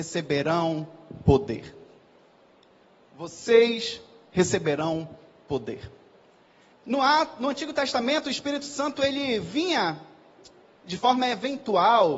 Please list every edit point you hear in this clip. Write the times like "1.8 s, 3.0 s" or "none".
6.7 s

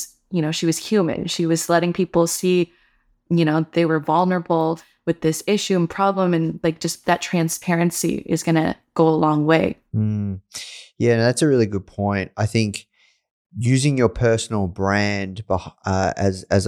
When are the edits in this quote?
none

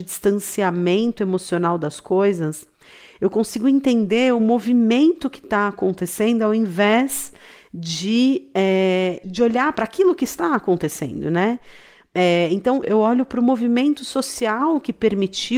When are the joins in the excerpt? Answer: 12.8 s

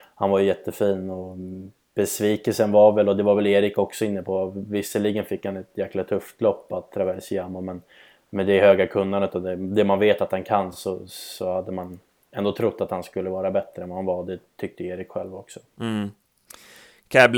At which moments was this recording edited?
none

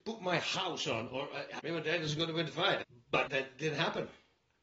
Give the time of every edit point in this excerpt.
1.6 s

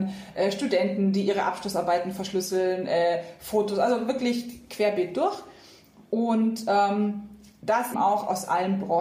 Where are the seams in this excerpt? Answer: 7.9 s

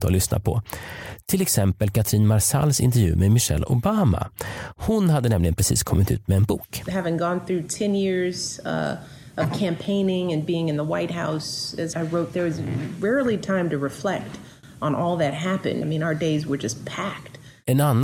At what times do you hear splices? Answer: 11.9 s, 15.8 s

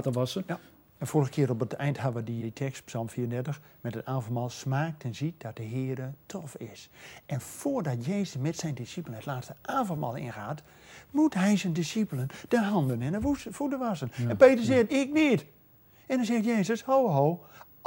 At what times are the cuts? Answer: 1.0 s, 2.4 s

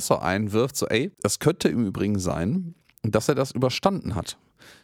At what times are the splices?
1.1 s

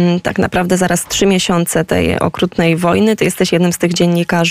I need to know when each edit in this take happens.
none

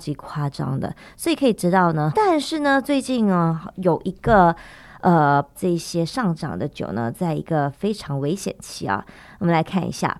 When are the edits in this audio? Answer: 2.1 s, 5.5 s

